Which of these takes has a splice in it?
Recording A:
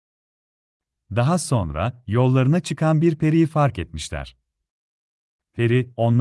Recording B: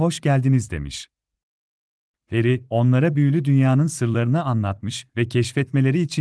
B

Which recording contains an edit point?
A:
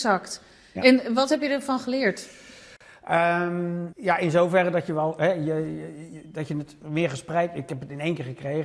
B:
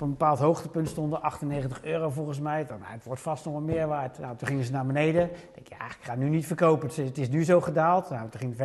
A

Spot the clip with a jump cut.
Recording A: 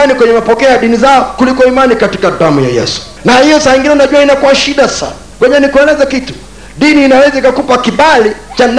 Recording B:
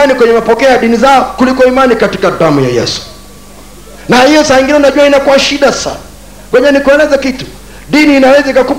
A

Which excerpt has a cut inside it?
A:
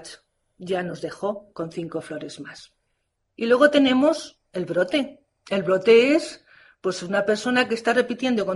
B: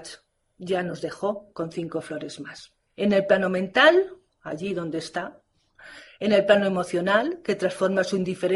B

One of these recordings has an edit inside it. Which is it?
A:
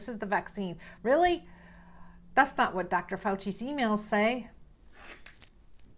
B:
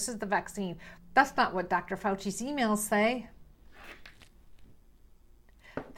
B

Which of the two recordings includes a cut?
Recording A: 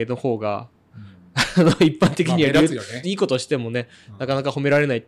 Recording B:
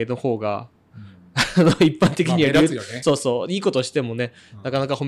A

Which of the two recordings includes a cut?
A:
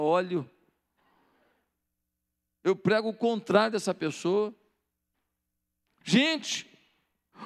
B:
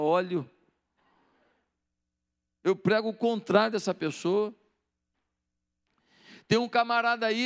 A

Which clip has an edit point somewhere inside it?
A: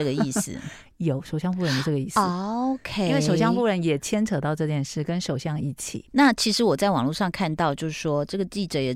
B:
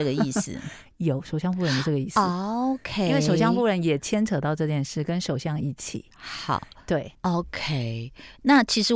A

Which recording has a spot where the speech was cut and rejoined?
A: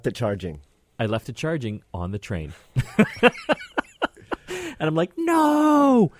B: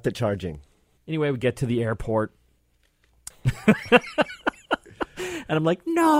B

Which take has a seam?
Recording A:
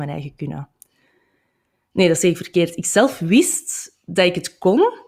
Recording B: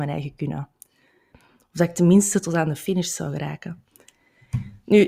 B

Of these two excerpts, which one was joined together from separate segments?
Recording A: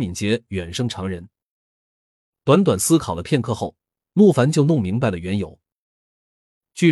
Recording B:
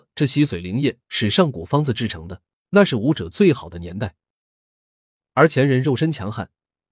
B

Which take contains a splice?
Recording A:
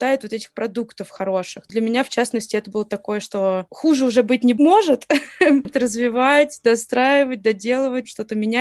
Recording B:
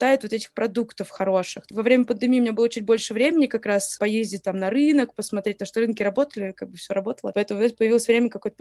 A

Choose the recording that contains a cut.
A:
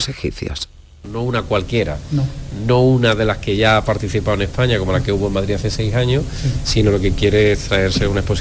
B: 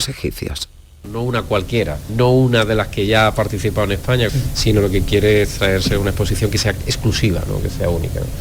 B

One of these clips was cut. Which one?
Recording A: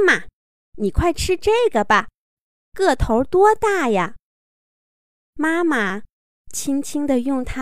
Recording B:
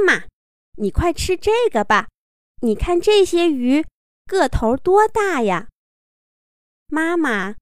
A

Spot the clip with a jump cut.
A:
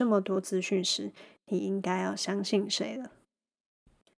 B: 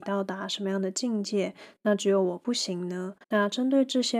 B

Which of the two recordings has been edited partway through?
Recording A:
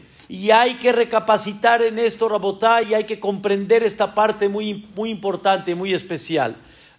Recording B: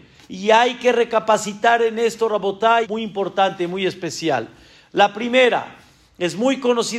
B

